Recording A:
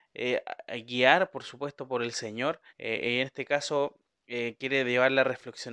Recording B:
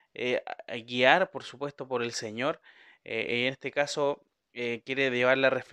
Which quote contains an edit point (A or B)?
A